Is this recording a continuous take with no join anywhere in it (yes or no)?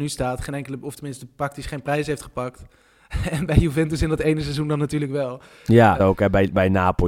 no